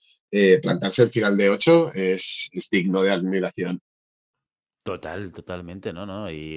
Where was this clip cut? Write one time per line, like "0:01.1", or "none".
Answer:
none